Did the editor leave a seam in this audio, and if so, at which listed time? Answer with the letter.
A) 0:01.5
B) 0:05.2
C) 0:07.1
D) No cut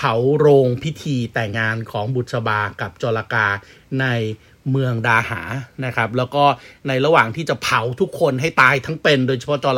A